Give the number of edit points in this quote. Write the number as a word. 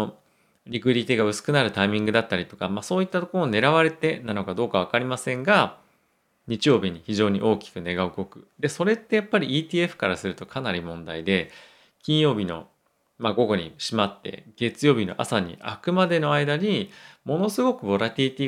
zero